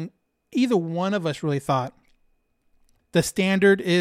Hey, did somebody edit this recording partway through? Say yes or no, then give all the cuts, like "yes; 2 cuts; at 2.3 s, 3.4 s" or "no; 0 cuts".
yes; 1 cut; at 3.0 s